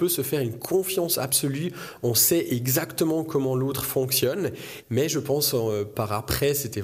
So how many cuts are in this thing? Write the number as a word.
one